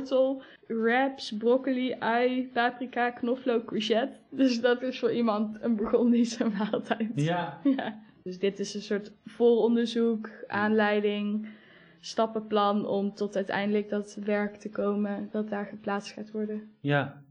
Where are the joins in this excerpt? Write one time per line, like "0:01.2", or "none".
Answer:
none